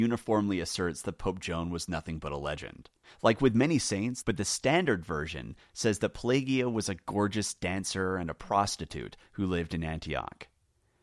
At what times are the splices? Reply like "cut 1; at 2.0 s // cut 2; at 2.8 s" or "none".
cut 1; at 3.0 s // cut 2; at 4.2 s